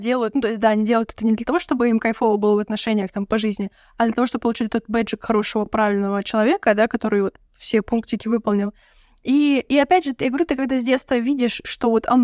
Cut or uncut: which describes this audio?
uncut